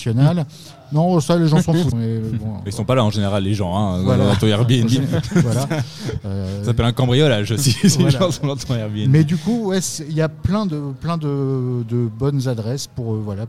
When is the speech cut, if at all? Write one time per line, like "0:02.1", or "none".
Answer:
0:01.9